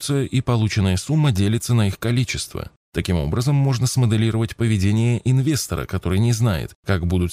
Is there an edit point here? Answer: no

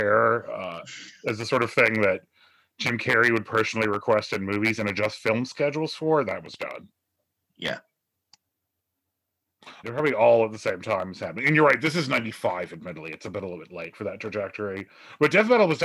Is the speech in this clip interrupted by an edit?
yes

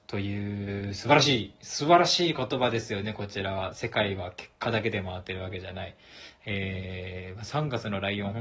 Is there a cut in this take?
no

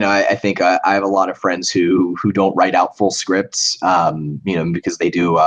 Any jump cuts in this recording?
no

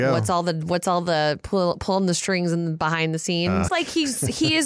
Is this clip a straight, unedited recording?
no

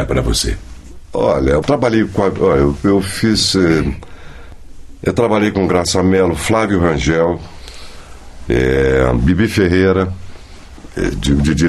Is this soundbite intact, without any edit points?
no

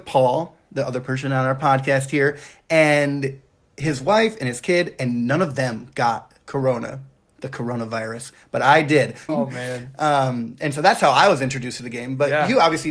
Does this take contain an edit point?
yes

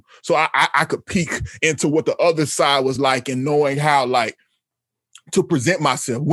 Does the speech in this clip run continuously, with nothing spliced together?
yes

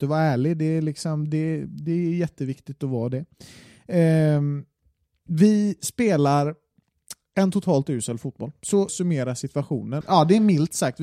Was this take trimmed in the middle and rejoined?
yes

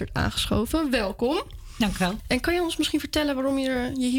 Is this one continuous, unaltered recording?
no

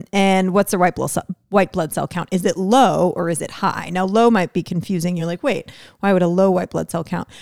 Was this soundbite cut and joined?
no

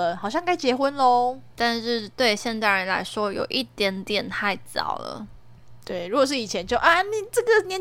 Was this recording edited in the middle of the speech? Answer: no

